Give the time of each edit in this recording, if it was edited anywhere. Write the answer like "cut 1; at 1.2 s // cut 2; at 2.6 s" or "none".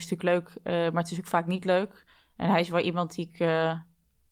none